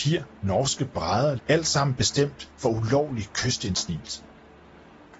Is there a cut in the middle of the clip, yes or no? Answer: yes